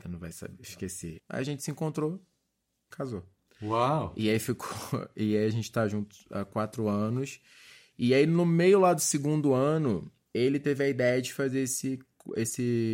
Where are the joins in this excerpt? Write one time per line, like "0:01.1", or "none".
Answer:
0:01.2